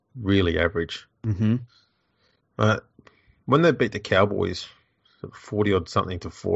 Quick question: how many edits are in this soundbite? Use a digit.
0